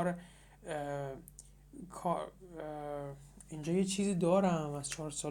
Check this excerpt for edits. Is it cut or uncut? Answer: uncut